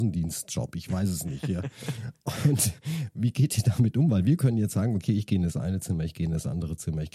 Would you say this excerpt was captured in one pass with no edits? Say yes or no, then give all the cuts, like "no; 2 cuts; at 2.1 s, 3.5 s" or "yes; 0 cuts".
yes; 0 cuts